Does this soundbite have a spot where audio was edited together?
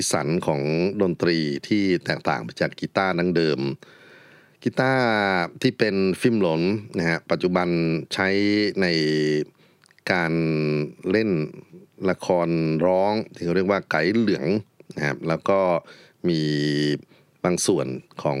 no; 0 cuts

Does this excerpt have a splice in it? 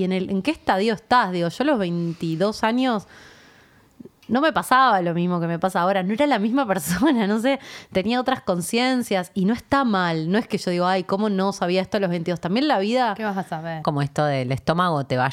yes; 1 cut; at 13.8 s

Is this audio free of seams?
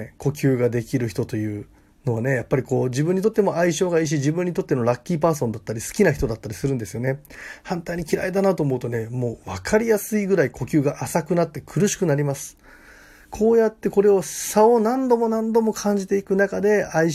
yes; 0 cuts

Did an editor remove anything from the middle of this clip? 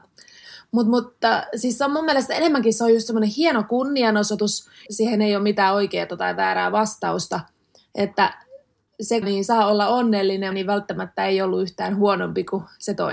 yes; 3 cuts; at 4.9 s, 9.2 s, 10.5 s

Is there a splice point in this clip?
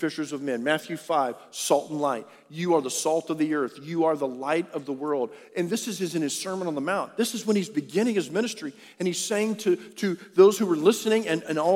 no; 0 cuts

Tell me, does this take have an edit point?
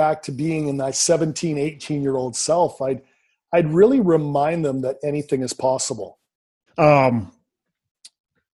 yes; 1 cut; at 6.7 s

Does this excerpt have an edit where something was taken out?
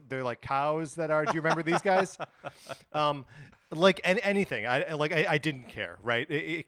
no; 0 cuts

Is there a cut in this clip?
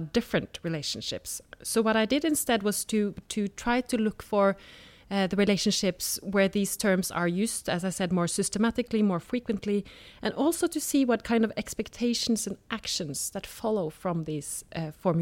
no; 0 cuts

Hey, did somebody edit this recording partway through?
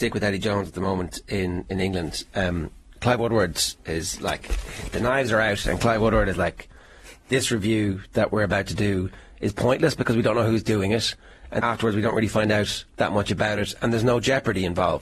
yes; 2 cuts; at 11.6 s, 12.9 s

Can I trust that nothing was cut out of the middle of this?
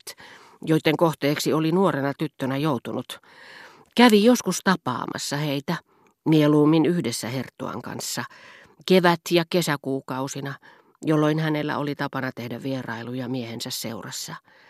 yes; 0 cuts

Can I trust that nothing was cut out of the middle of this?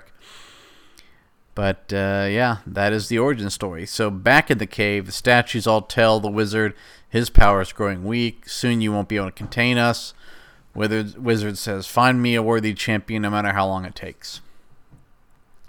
yes; 0 cuts

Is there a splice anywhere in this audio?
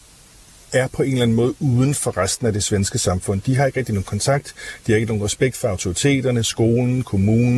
no; 0 cuts

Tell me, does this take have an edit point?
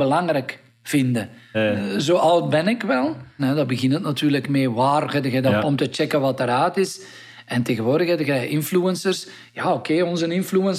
yes; 3 cuts; at 1.5 s, 3.4 s, 5.6 s

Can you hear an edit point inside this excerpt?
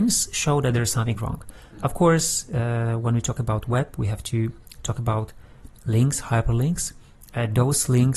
no; 0 cuts

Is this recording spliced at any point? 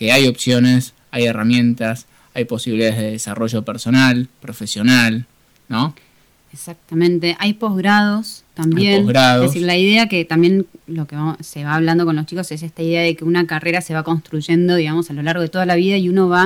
no; 0 cuts

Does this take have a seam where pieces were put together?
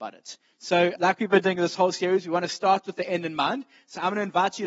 yes; 1 cut; at 1.0 s

